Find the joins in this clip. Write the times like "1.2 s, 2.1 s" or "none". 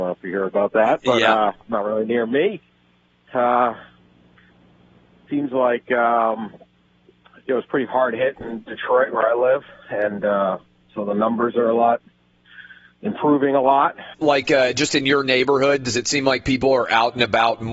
3.3 s, 14.1 s